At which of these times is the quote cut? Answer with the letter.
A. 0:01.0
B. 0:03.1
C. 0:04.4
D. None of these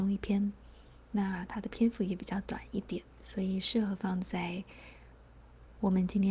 B